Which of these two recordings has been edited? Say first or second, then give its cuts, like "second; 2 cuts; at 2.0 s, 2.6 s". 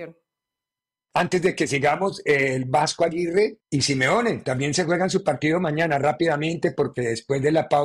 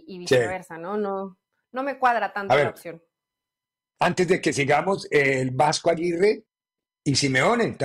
first; 1 cut; at 3.6 s